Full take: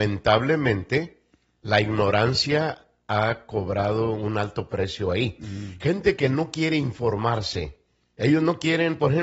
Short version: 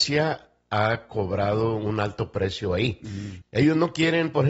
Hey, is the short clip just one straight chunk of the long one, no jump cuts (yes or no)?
no